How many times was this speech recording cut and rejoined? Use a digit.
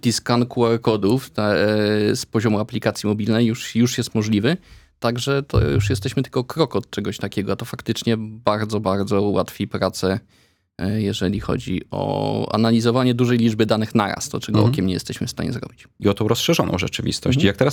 1